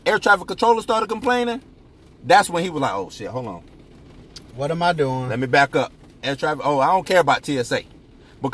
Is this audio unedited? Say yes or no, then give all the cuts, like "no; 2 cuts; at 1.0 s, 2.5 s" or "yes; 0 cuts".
yes; 0 cuts